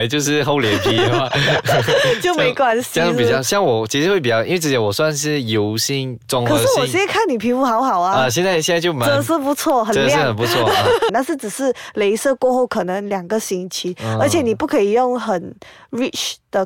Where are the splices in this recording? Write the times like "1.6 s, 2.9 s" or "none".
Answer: 11.1 s